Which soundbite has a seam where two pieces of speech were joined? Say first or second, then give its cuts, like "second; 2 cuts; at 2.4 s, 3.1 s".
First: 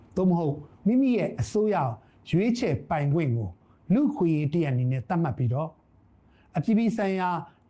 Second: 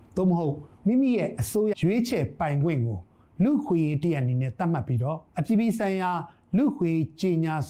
second; 2 cuts; at 1.7 s, 5.3 s